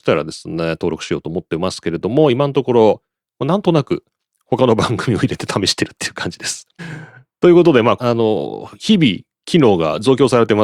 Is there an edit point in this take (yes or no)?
yes